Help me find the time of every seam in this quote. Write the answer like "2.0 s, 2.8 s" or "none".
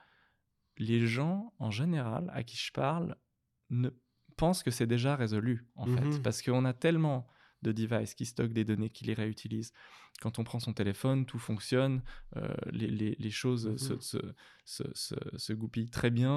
none